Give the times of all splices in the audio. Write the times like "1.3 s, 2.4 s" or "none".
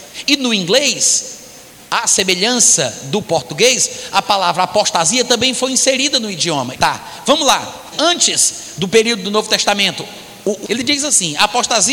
6.7 s, 7.9 s, 10.6 s